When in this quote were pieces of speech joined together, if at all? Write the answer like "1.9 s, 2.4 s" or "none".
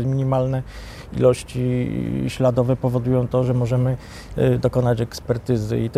none